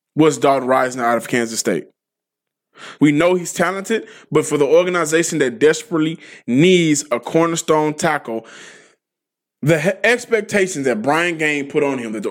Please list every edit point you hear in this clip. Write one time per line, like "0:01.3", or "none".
0:03.0

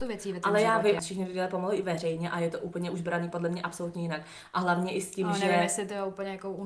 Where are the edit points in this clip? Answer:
0:01.0

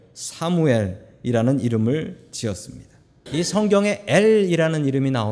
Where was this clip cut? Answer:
0:03.3

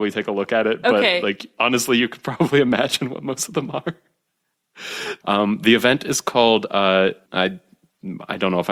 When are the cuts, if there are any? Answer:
0:05.2
0:07.3

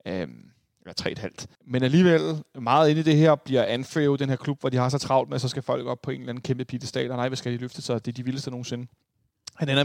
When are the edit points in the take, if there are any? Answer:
0:01.6

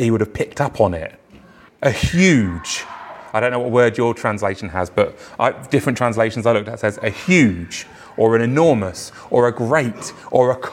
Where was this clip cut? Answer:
0:01.7

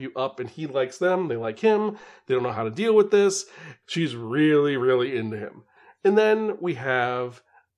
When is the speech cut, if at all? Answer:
0:03.8

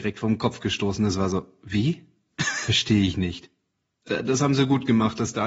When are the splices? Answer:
none

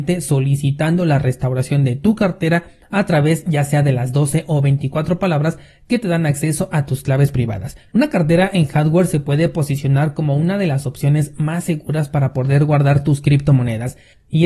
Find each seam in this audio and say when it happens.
0:07.9

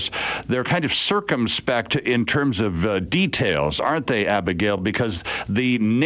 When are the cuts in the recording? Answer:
none

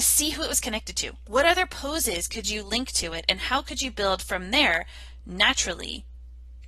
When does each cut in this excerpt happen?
none

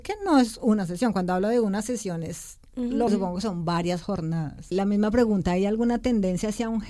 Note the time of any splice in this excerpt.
0:03.1
0:04.7

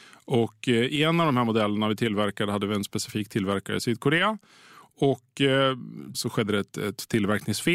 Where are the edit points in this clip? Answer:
0:06.1

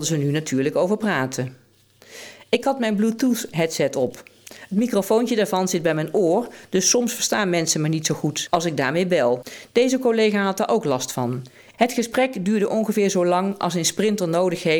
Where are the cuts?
0:11.7

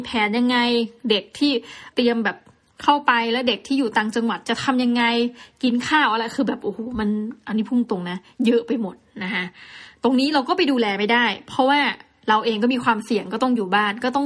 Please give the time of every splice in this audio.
0:01.9

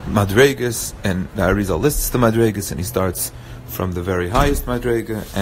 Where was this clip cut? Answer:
none

